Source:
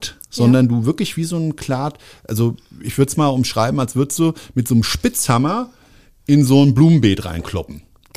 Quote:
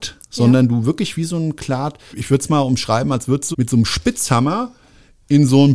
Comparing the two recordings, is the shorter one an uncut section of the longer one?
no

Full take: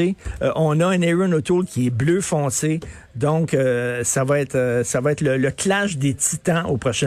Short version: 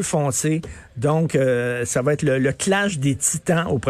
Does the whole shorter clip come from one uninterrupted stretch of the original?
no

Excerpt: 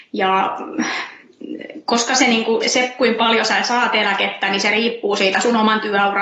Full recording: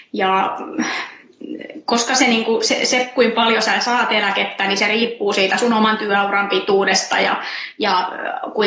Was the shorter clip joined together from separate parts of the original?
yes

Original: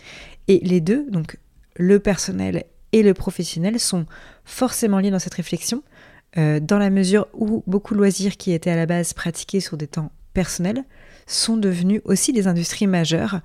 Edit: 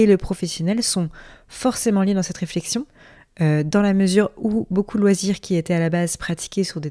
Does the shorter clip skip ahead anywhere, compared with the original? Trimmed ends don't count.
no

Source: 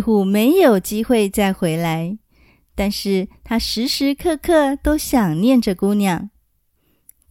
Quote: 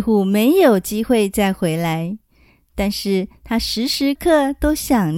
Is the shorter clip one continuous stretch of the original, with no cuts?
no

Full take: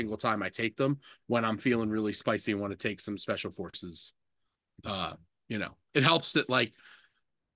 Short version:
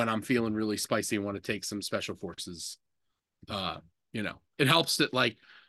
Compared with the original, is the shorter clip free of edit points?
yes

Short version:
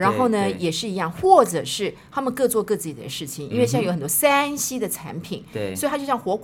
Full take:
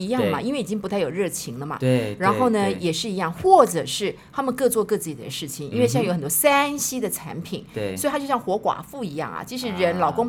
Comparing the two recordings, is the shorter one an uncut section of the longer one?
yes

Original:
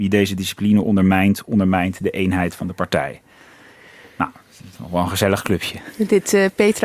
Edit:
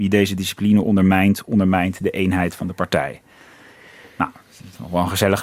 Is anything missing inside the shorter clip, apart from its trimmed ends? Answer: no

